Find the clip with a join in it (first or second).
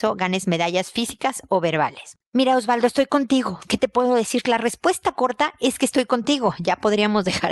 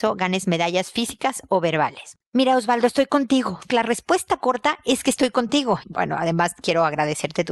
second